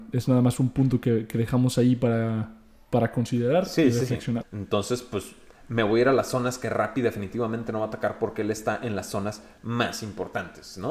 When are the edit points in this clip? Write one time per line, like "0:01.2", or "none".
0:04.4